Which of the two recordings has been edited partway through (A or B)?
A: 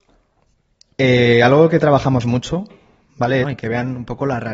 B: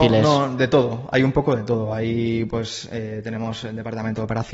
A